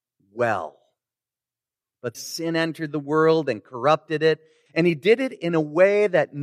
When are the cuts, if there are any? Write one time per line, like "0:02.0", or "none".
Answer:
0:02.1
0:04.7